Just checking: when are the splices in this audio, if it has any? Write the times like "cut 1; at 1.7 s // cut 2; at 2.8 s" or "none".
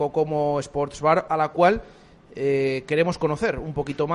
cut 1; at 1.3 s